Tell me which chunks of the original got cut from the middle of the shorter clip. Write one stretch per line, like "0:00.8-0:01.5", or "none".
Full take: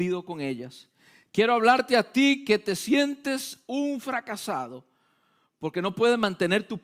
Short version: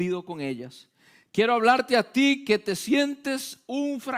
none